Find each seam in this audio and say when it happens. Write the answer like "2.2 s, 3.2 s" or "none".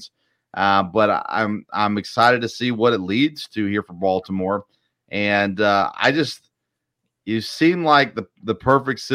none